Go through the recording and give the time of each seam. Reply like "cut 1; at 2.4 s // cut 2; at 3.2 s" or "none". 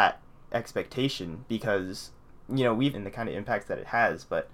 cut 1; at 2.9 s

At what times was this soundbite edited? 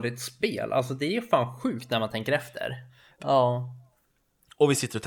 cut 1; at 3.2 s

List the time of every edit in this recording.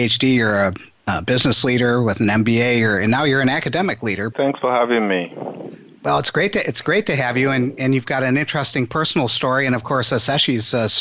cut 1; at 4.3 s

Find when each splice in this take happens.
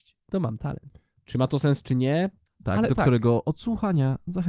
cut 1; at 1.2 s // cut 2; at 2.5 s

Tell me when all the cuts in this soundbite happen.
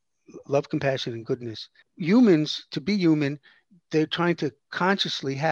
cut 1; at 1.8 s

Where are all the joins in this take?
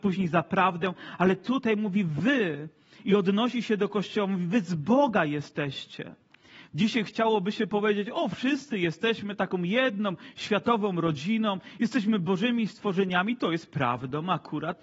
cut 1; at 6.7 s

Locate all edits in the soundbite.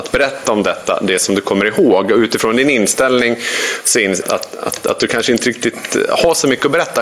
cut 1; at 4.2 s

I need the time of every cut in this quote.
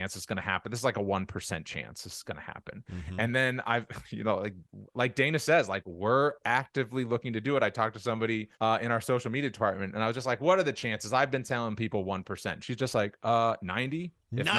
cut 1; at 8.5 s

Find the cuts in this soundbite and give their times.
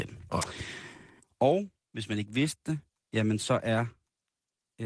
cut 1; at 1.2 s

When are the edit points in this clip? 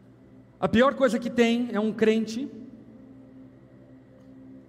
none

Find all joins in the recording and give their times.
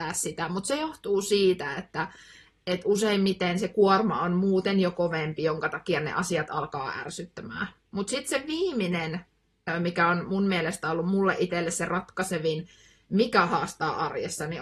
cut 1; at 7.8 s

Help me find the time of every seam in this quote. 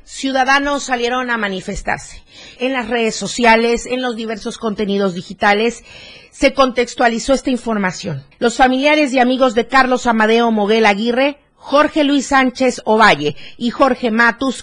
cut 1; at 2.6 s // cut 2; at 8.3 s

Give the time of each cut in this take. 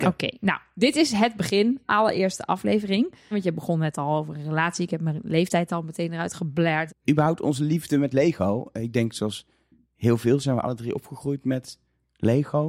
cut 1; at 3.3 s // cut 2; at 6.9 s

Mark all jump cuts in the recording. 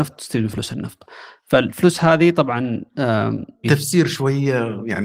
cut 1; at 3.6 s

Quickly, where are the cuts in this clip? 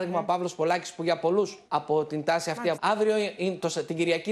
cut 1; at 1.6 s // cut 2; at 2.7 s

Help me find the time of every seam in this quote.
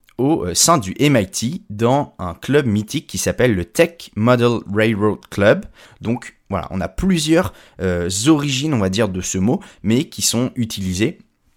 cut 1; at 5.9 s

